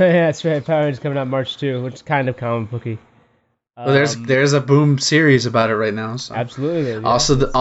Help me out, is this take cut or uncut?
uncut